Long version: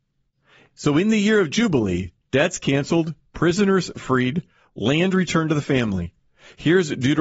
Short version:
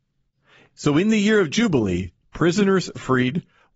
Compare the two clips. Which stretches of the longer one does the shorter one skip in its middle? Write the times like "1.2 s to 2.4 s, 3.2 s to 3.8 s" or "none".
2.2 s to 3.2 s